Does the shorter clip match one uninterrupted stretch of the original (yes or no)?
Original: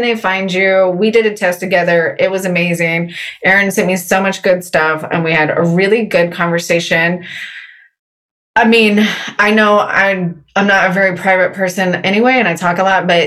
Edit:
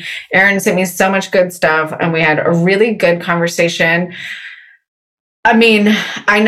yes